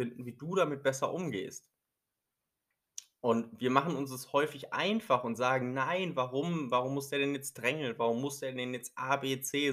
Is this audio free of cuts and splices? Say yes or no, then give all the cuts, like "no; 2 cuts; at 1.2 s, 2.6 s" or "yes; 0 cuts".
yes; 0 cuts